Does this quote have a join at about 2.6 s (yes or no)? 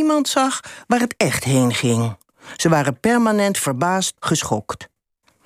no